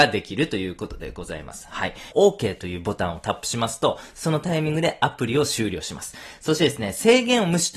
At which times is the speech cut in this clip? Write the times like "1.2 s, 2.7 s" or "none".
2.1 s